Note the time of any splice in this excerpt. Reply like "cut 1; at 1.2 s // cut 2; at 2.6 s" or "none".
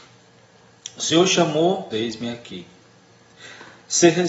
cut 1; at 1.9 s